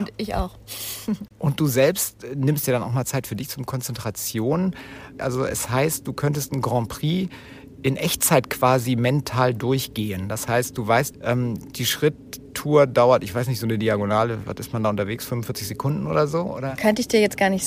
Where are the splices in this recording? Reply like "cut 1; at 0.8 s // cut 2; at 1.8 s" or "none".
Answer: cut 1; at 5.2 s // cut 2; at 11.1 s